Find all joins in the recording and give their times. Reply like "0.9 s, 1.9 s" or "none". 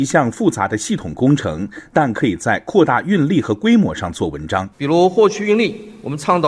4.7 s